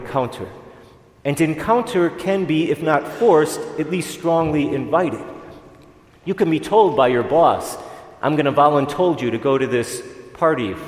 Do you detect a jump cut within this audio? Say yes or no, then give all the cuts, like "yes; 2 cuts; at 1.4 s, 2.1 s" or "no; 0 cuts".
no; 0 cuts